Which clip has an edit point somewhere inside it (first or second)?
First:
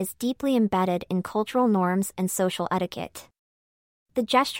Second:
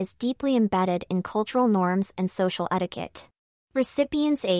second